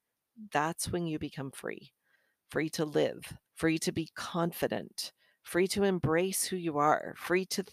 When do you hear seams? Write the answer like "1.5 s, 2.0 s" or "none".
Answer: 3.5 s